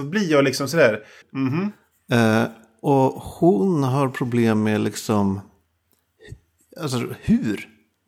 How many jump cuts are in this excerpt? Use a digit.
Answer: 1